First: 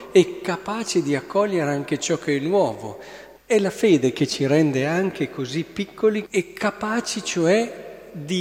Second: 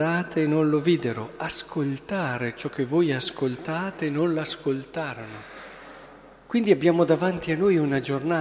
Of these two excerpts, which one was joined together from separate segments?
first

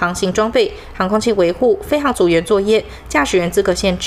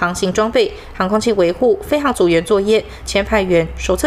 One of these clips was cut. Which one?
second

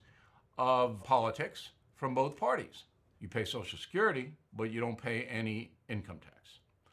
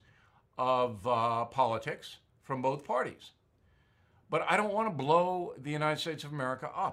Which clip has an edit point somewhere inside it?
first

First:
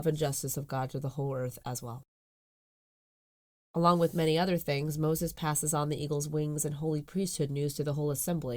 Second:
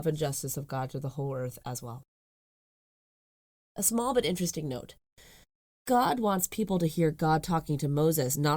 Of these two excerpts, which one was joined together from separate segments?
second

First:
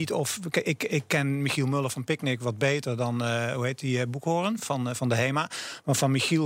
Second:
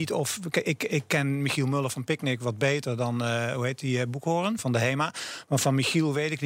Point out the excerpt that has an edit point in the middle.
second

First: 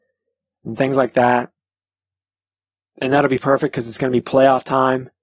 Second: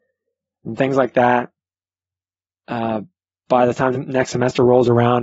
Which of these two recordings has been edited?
second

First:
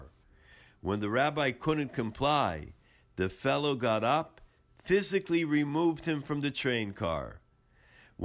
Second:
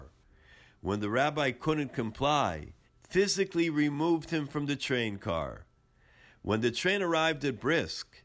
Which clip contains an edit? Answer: second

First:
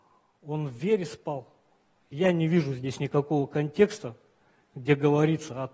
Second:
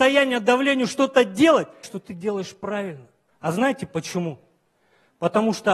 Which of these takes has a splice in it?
second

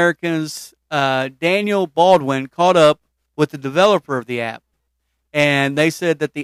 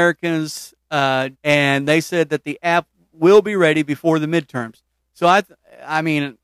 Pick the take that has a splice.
second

